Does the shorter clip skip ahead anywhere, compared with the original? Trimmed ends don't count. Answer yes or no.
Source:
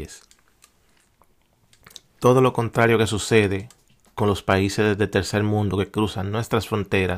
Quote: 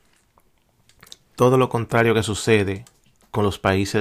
no